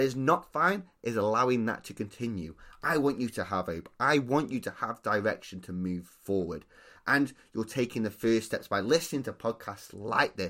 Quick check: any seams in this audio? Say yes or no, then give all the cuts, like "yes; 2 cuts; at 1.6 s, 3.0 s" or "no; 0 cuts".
no; 0 cuts